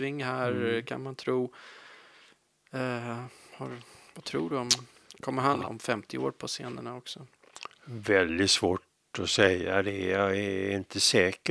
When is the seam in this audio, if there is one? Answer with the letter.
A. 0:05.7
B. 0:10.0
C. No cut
A